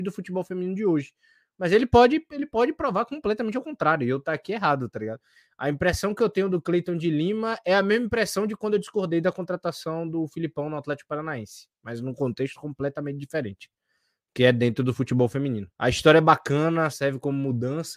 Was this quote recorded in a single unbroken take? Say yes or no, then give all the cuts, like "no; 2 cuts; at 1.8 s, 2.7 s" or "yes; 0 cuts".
no; 2 cuts; at 15.7 s, 16.9 s